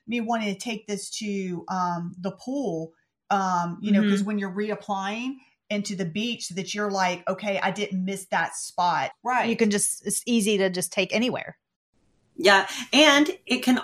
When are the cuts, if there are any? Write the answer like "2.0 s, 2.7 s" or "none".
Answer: 9.1 s

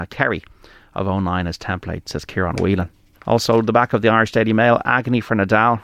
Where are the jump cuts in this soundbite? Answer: 3.1 s

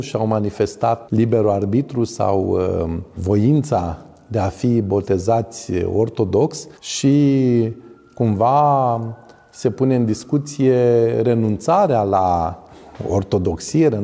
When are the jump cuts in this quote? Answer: 1.1 s, 6.8 s

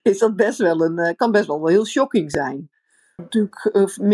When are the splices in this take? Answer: 3.2 s

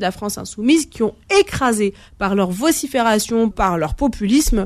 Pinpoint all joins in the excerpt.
3.5 s

